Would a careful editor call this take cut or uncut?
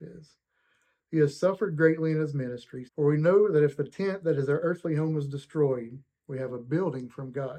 cut